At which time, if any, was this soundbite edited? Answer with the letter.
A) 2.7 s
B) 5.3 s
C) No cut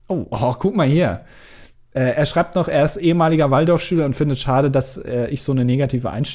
C